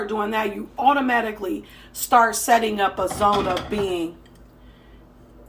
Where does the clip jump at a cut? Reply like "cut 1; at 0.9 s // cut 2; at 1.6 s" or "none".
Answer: none